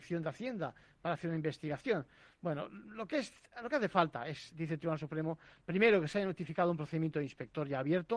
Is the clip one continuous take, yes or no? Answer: yes